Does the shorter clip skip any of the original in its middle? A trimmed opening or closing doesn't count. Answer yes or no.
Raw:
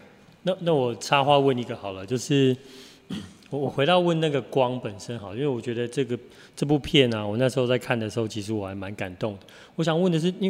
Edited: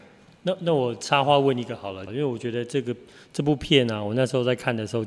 yes